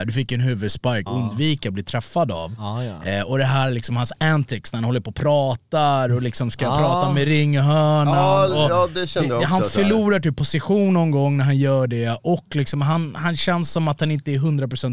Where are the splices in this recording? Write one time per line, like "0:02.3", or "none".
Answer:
0:01.1